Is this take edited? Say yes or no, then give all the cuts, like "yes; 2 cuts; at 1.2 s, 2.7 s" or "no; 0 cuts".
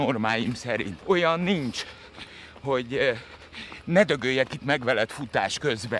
yes; 1 cut; at 1.0 s